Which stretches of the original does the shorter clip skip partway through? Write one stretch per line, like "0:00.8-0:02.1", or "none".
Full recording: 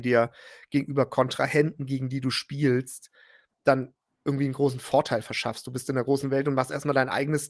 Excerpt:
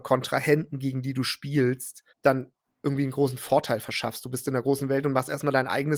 0:03.2-0:03.5